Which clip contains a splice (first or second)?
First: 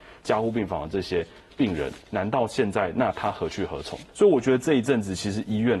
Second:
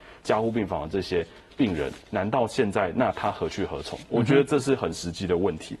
first